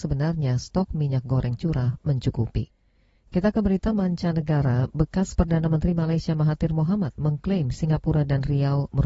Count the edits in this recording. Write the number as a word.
zero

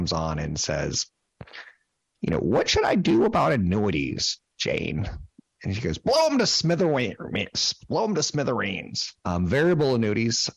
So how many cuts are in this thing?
one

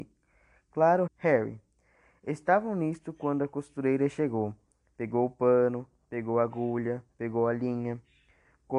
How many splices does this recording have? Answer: one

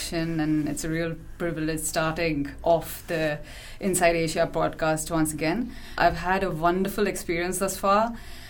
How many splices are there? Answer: one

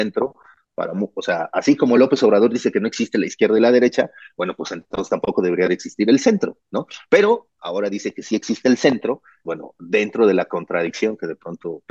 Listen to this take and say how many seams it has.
one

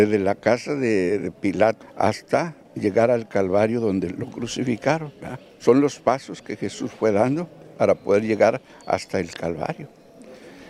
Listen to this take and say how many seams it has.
one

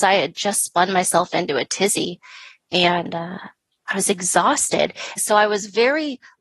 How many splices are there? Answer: one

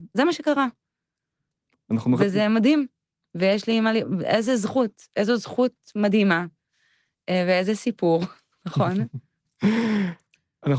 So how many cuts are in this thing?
zero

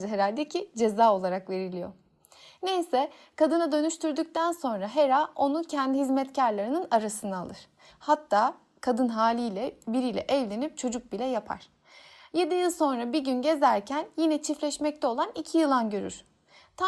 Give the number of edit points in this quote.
one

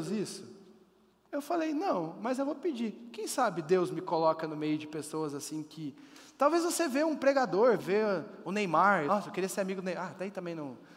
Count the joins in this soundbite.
two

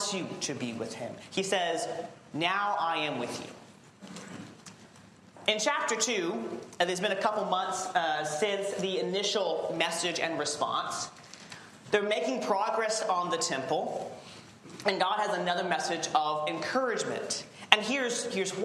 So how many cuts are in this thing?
one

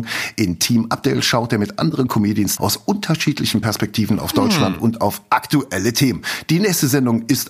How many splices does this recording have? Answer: one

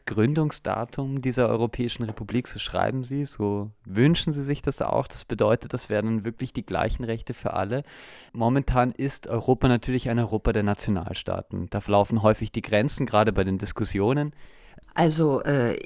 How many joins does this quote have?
one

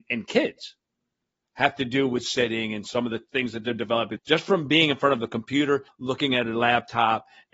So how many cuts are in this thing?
two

